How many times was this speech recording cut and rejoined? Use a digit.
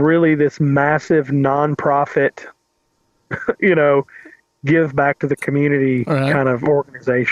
0